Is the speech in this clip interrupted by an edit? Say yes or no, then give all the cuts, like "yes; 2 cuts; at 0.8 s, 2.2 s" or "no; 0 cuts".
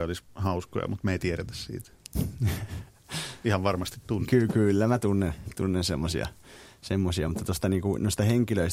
no; 0 cuts